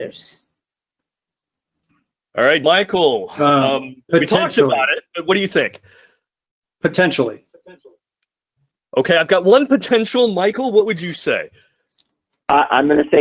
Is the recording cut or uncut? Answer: cut